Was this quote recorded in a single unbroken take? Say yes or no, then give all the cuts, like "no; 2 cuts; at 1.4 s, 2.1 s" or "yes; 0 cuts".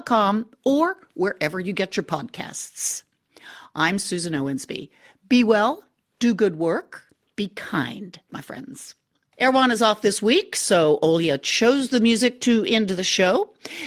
no; 1 cut; at 8.3 s